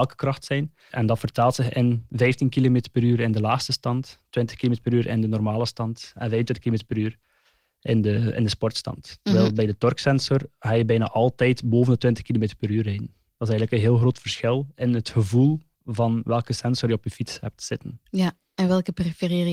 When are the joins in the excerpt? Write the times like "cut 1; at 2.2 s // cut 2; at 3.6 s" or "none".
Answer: cut 1; at 0.9 s